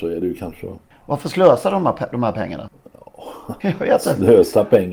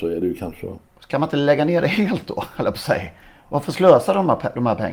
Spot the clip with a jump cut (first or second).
first